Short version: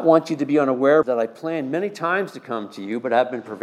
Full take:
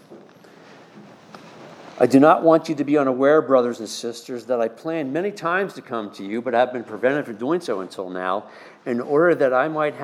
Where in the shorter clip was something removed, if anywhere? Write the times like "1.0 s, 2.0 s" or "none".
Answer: 1.0 s